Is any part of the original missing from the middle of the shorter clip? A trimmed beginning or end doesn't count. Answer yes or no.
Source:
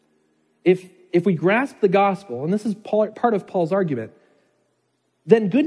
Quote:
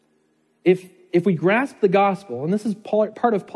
no